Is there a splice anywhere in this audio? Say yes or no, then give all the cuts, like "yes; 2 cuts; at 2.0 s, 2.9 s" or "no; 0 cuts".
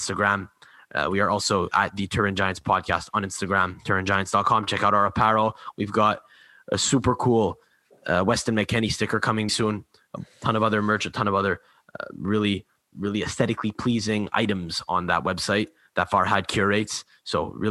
yes; 2 cuts; at 9.5 s, 12.9 s